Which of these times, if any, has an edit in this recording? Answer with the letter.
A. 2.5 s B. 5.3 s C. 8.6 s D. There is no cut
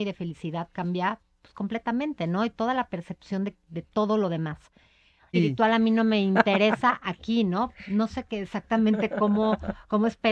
B